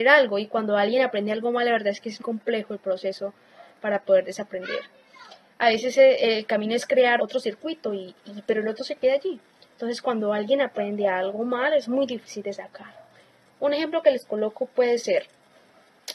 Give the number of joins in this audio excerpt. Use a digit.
2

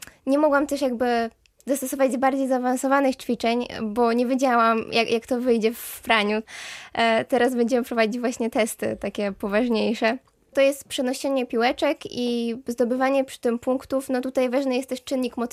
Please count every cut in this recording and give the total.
0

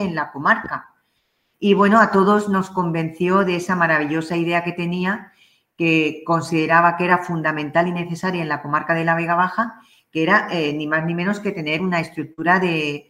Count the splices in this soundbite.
1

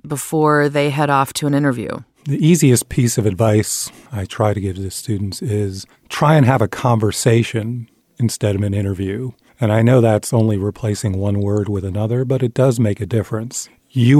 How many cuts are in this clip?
0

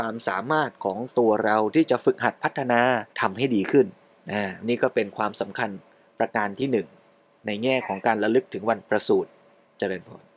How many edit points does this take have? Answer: 1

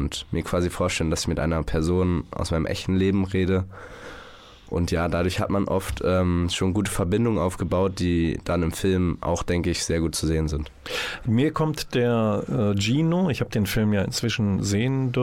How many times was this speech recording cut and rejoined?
0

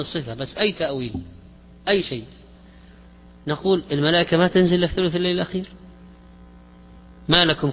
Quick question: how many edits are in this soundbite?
0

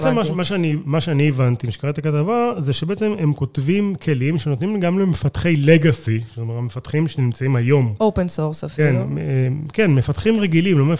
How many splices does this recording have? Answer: 0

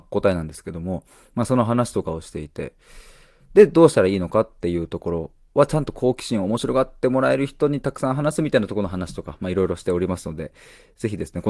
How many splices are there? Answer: 0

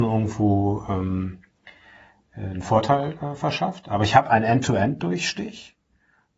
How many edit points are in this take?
0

